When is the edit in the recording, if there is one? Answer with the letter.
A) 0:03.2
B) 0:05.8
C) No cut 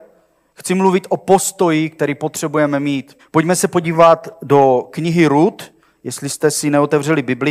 A